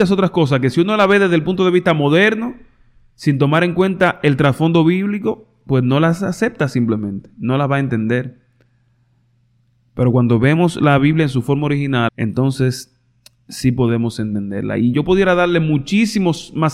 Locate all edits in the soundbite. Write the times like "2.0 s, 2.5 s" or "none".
12.1 s